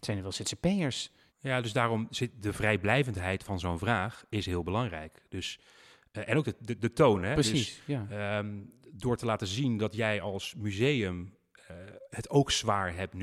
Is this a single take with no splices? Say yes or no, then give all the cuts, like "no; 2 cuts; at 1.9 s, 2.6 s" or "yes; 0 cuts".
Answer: no; 1 cut; at 1.3 s